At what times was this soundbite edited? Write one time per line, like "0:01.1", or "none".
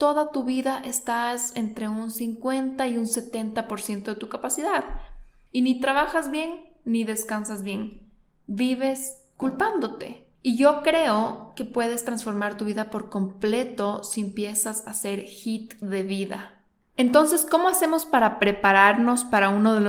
0:10.3

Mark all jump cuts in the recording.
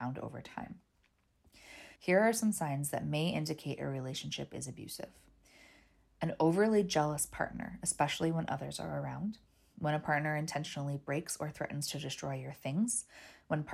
0:02.0

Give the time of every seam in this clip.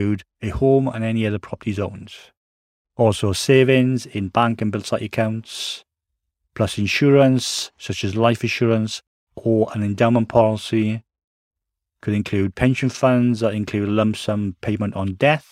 none

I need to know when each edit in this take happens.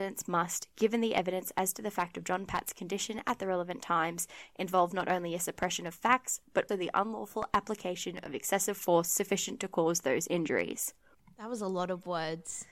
0:06.7

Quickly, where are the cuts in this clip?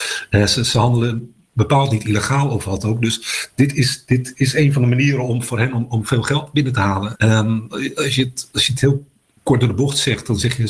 0:07.1

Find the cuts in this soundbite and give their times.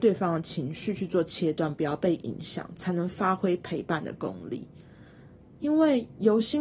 none

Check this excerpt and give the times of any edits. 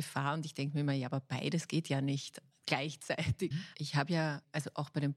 0:03.5

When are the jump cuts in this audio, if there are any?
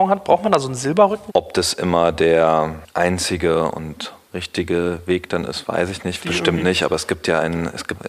0:01.3
0:06.2

